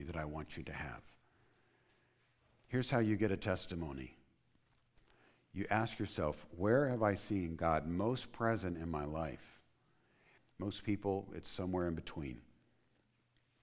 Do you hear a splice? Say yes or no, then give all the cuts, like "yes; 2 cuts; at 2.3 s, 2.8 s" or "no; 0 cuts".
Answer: yes; 1 cut; at 10.4 s